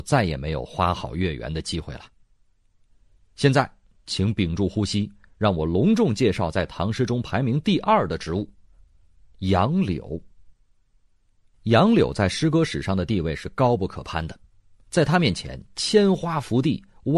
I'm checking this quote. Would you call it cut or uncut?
uncut